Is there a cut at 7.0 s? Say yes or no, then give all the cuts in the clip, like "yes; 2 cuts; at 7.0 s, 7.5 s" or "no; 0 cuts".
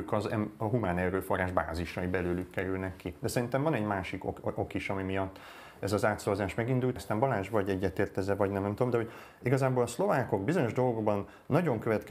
yes; 1 cut; at 7.0 s